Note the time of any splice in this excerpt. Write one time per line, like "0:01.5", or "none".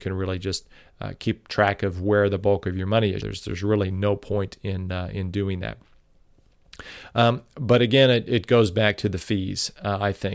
0:03.2